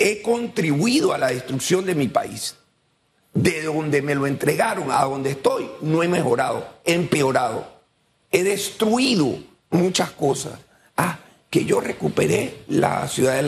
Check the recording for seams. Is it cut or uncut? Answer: uncut